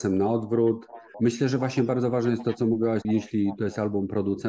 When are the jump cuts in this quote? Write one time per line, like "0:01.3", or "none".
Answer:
0:01.1
0:03.0